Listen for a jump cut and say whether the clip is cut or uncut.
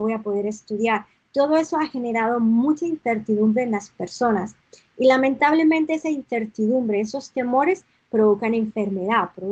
uncut